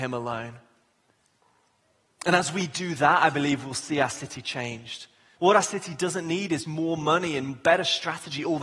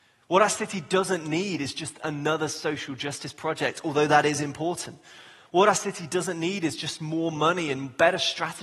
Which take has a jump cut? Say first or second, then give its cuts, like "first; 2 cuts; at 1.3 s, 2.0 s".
first; 2 cuts; at 5.4 s, 6.6 s